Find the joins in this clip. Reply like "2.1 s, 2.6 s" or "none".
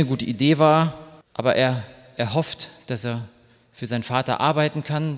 1.2 s